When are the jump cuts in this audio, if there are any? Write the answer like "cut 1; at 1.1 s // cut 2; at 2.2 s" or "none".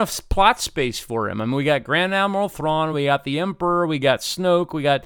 none